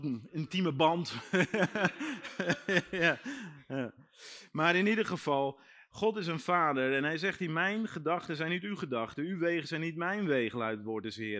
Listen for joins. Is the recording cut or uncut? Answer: uncut